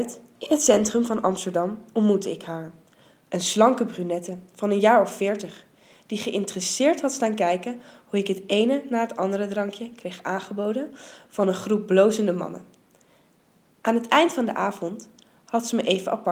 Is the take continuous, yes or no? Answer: yes